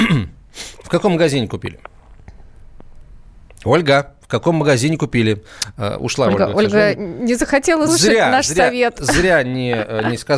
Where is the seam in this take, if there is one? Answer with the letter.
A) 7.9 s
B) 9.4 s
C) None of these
A